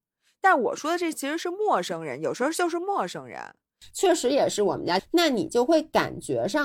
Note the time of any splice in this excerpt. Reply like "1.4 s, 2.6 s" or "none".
3.8 s, 5.0 s